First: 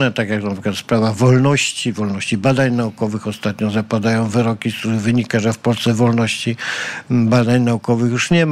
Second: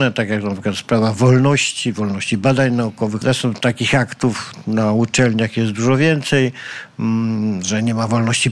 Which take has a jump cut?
second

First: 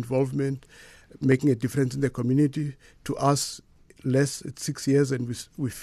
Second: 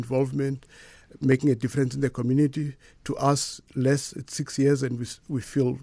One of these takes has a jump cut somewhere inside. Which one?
second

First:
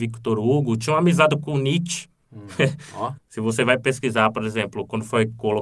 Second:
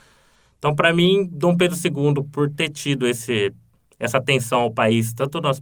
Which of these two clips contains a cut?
first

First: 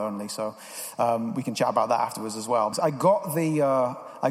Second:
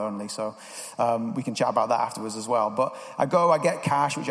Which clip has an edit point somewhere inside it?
first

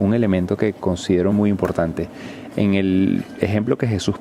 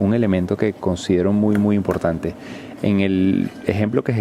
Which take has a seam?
first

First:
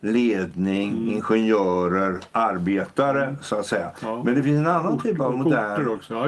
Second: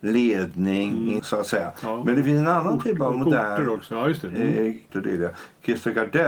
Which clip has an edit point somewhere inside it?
second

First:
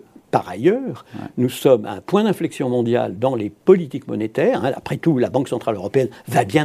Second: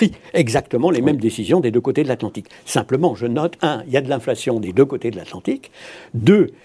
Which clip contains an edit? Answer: second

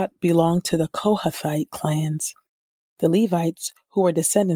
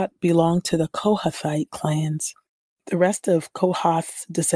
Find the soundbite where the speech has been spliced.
second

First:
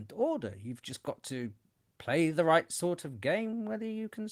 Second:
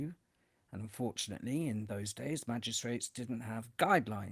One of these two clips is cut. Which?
first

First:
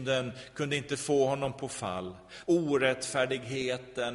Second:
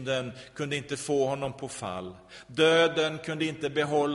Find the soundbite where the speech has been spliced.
first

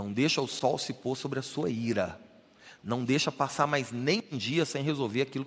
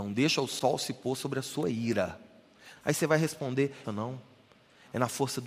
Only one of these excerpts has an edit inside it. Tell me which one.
second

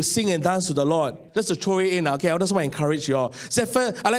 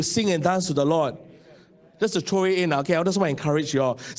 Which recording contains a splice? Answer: first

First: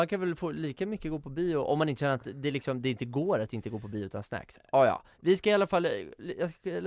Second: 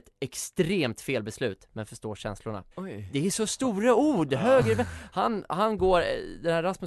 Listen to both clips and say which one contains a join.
second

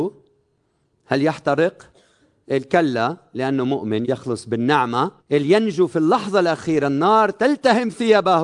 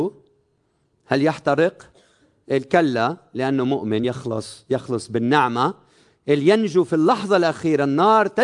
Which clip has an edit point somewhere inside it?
first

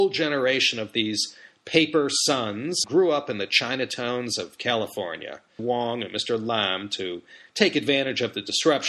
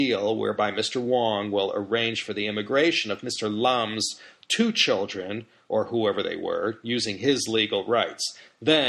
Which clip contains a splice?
first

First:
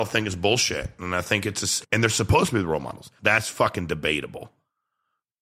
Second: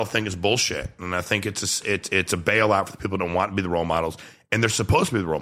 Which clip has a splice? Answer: first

